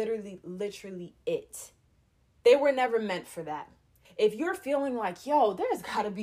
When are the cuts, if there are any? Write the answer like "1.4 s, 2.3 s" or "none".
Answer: 2.4 s, 4.0 s